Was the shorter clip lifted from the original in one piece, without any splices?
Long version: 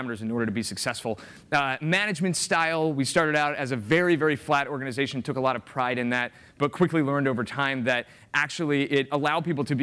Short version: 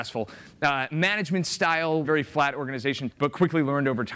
no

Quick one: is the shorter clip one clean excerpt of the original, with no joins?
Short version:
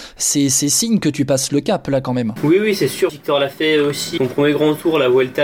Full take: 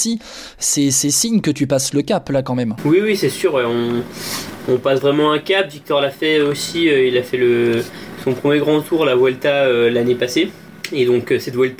no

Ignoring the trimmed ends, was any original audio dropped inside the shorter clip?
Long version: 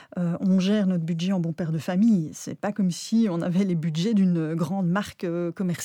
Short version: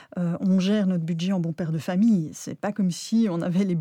no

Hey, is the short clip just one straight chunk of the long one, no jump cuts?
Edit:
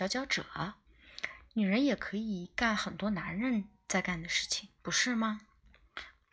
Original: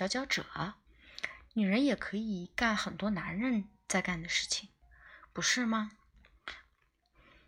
no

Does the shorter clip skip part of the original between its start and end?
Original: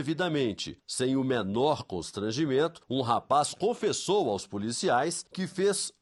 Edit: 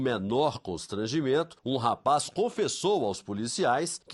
no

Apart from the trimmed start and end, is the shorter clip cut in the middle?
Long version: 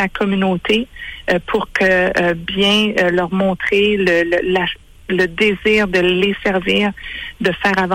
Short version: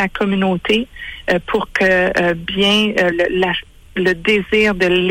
yes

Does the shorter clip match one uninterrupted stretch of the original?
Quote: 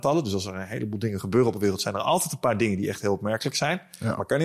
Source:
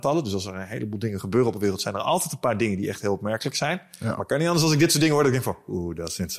yes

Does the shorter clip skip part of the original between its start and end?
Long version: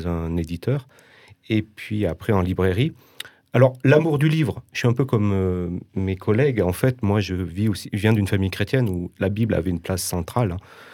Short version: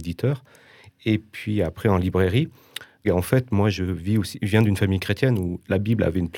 yes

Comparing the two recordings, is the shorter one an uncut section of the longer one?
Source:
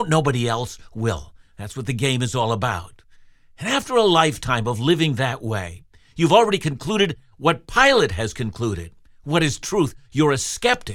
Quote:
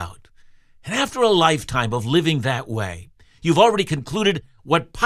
yes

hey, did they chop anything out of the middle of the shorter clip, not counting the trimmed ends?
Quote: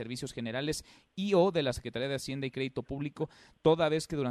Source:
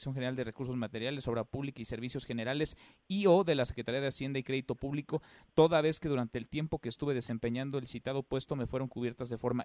no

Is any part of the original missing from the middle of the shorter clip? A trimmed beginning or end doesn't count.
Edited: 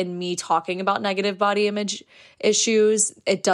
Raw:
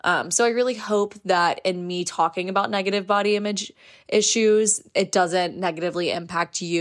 no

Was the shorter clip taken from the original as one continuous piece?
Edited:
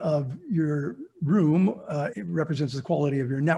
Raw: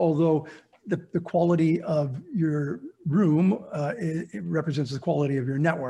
no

